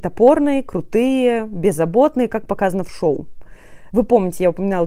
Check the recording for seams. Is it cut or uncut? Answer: uncut